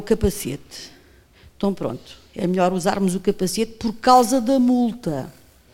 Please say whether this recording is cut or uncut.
uncut